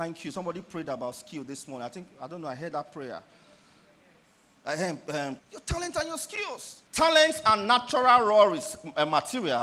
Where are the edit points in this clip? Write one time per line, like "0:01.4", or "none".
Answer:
0:05.4
0:06.9